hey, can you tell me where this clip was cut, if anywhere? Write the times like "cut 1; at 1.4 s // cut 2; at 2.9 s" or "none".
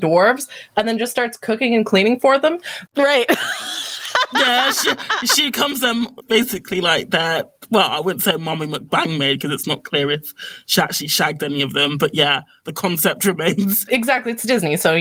cut 1; at 2.9 s